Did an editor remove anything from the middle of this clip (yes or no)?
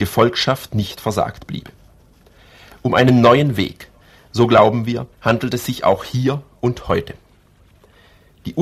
yes